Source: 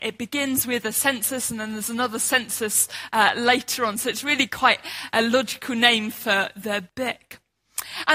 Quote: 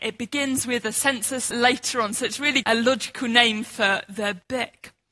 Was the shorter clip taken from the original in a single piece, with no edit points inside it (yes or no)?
no